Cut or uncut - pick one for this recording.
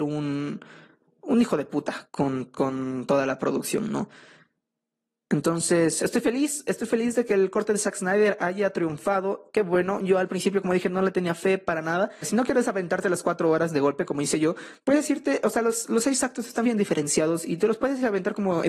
cut